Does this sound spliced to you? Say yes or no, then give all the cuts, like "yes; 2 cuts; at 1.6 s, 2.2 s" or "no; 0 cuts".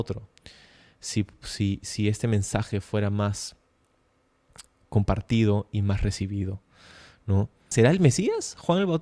yes; 1 cut; at 7.7 s